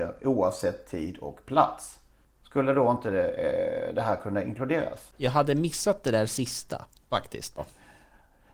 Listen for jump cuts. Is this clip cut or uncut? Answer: cut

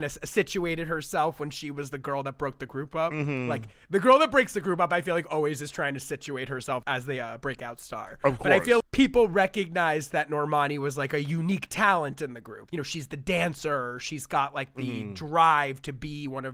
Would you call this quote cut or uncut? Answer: cut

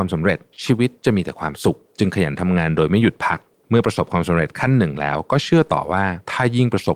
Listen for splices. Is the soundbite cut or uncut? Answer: uncut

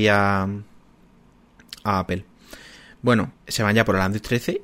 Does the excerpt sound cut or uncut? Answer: cut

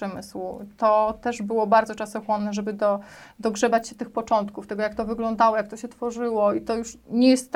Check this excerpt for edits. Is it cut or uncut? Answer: uncut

